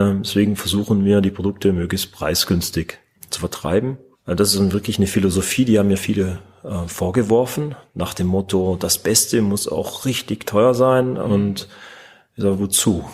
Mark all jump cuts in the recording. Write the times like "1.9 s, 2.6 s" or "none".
6.0 s